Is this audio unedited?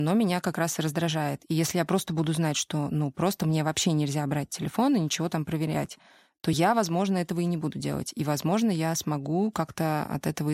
yes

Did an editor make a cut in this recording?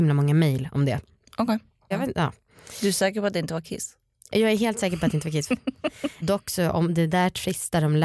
yes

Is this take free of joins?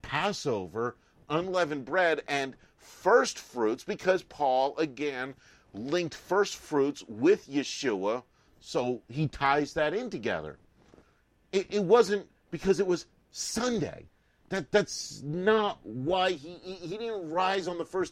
no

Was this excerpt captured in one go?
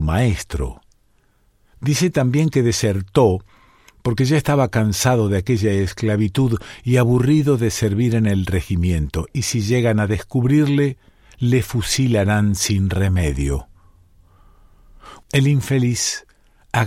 no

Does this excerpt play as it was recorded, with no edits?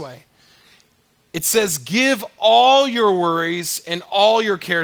yes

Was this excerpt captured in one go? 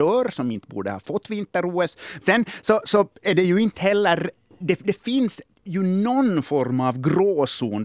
no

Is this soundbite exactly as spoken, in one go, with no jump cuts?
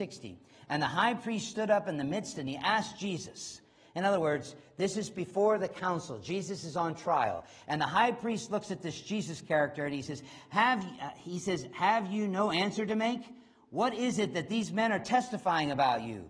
yes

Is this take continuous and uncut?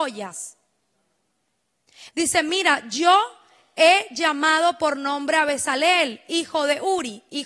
no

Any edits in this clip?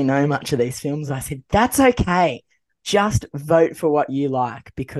no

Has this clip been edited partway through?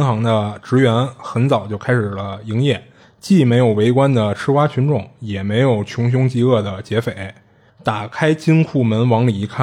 yes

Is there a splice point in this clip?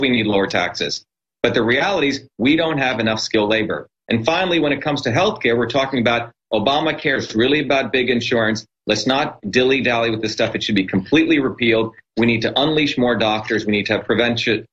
no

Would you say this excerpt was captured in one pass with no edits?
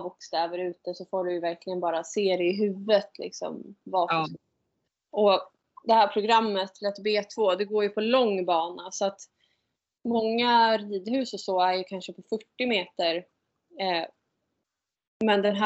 yes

